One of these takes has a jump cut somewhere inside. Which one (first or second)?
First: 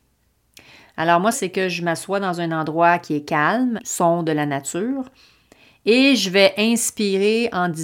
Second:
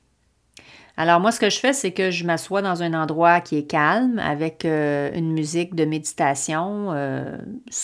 first